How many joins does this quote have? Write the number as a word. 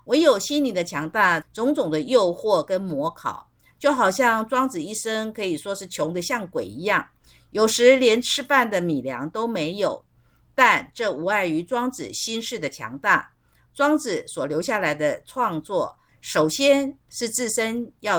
two